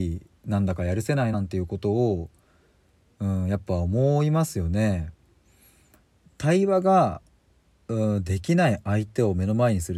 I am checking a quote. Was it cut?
yes; 1 cut; at 1.3 s

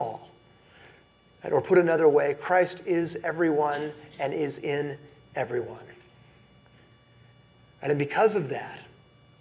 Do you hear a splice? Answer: no; 0 cuts

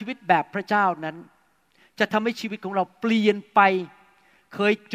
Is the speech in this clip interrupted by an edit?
no; 0 cuts

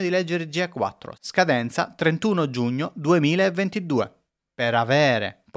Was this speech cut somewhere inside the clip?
yes; 1 cut; at 1.1 s

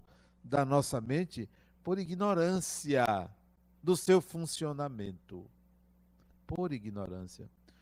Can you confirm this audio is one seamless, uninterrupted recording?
yes; 0 cuts

